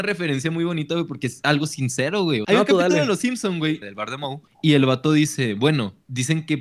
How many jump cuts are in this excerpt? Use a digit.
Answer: 2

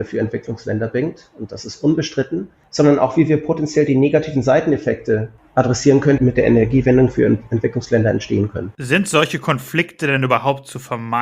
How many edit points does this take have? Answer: 1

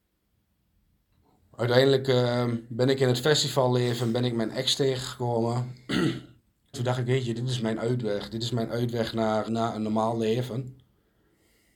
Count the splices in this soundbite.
2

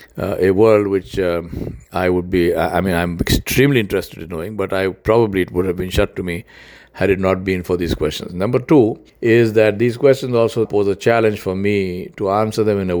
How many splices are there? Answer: 2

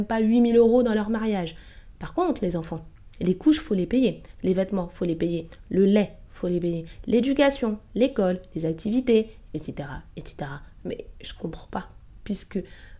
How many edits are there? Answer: 2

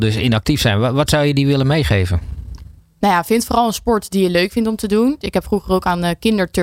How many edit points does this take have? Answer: 1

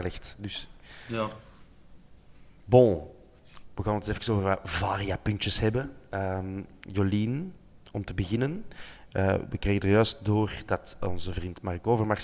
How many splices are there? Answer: 1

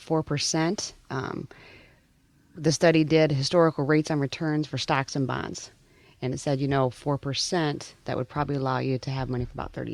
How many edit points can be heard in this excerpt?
1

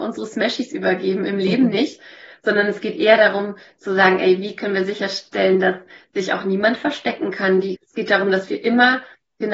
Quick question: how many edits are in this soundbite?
1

